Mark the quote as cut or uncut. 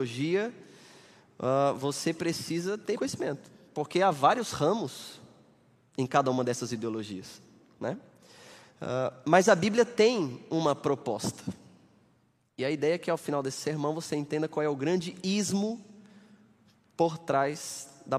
cut